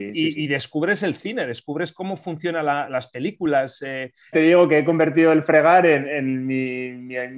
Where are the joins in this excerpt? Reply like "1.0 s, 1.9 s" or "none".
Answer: 4.3 s